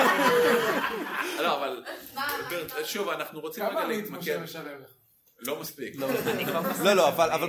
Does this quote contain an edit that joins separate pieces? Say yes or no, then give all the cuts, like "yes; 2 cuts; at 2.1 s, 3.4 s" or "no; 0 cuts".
no; 0 cuts